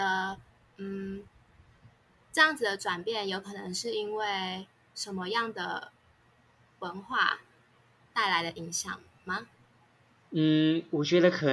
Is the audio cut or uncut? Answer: uncut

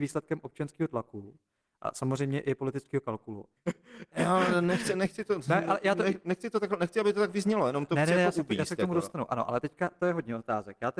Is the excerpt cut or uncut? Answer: cut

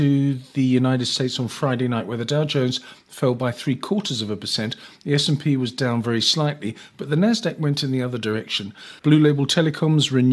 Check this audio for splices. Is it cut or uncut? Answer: cut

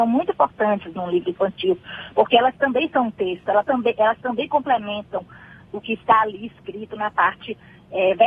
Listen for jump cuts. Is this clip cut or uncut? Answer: uncut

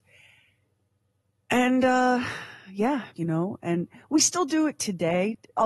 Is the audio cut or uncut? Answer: cut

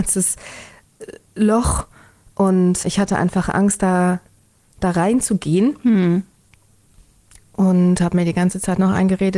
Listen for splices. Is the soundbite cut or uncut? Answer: cut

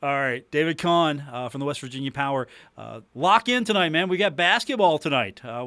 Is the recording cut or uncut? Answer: cut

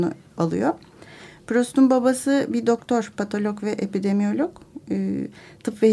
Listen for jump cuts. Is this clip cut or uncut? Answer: uncut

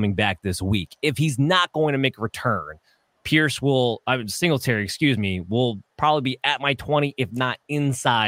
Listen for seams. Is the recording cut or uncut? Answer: uncut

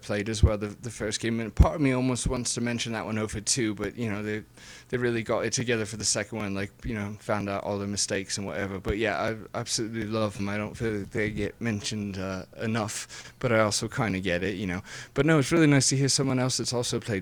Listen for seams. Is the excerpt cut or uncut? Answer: uncut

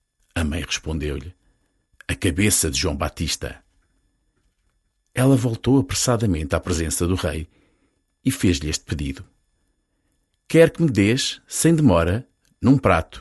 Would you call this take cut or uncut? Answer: uncut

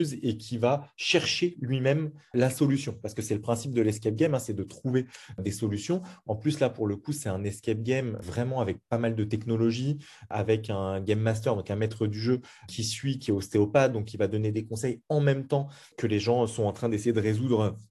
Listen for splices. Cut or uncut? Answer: uncut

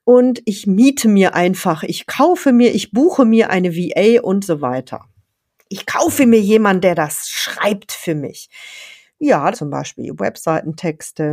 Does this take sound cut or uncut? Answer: cut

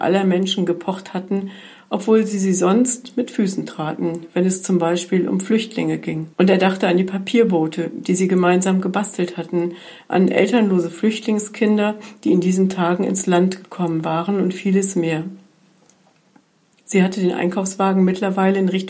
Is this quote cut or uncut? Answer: cut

